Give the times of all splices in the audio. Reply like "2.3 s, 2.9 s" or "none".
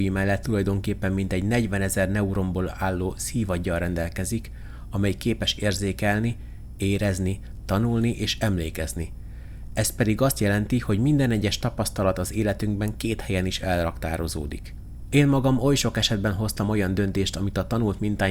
15.1 s